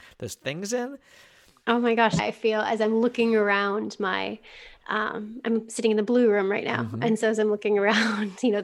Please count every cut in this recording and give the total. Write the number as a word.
one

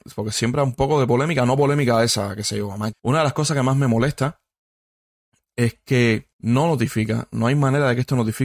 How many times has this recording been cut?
two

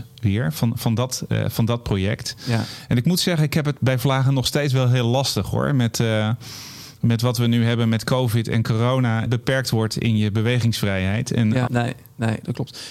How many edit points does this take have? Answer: two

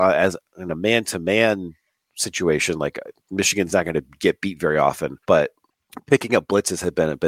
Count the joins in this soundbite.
one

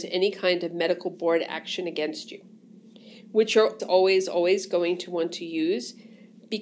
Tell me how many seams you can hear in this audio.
one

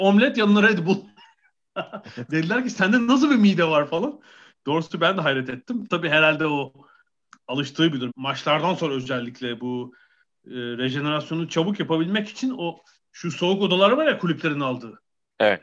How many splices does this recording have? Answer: one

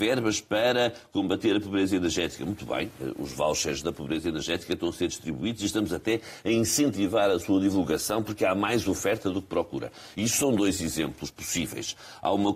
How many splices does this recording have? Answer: zero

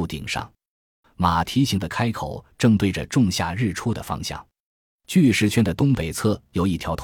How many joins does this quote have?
one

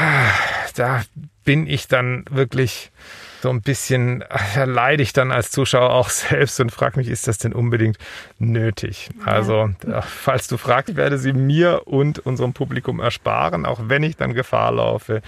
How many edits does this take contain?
two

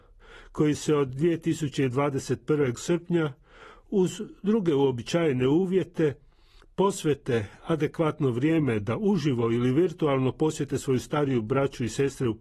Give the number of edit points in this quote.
one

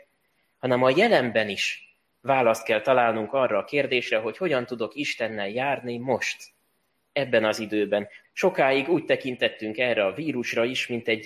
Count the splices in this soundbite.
one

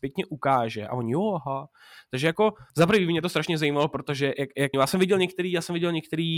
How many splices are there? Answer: two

